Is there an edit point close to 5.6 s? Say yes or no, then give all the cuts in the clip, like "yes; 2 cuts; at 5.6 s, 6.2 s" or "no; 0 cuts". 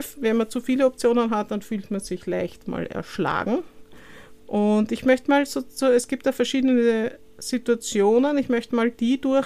no; 1 cut; at 4.4 s